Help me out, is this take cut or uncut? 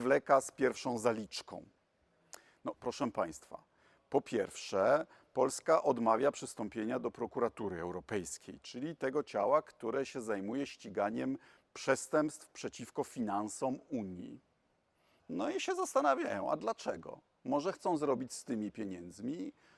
uncut